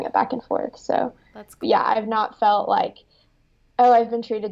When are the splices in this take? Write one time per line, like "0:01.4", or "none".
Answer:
0:01.6